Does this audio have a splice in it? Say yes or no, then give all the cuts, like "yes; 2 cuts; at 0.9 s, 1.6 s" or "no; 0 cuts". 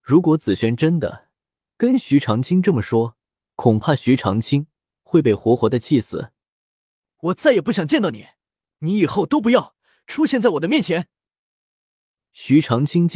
no; 0 cuts